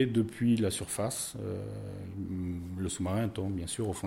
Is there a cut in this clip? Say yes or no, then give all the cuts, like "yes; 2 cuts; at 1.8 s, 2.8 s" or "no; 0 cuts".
no; 0 cuts